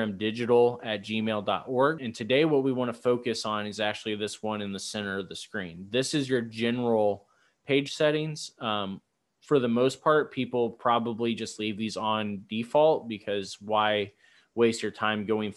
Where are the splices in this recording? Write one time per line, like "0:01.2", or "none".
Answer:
0:02.0